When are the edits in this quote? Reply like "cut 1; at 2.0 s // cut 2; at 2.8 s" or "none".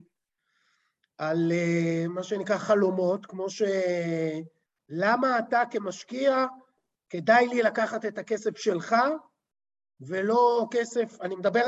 cut 1; at 4.8 s